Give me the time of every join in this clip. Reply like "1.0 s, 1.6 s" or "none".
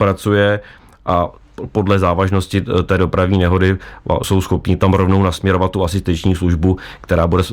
4.2 s